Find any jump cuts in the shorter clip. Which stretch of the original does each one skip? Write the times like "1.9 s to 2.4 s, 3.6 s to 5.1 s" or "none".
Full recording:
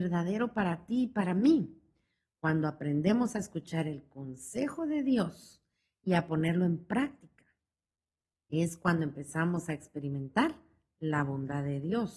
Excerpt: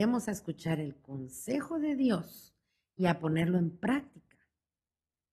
none